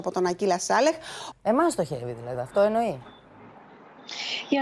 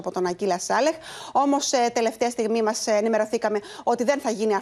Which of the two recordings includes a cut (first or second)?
first